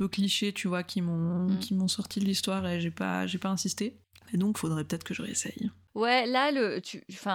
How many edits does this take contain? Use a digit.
1